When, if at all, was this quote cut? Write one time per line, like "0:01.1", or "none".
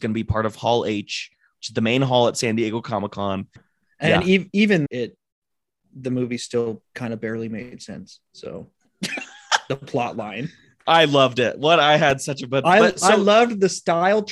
0:03.6
0:04.9